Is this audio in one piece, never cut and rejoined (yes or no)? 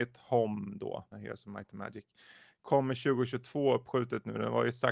no